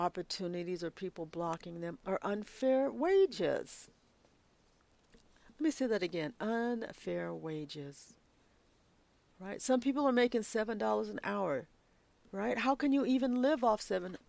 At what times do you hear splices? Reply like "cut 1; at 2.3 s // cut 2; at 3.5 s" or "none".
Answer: none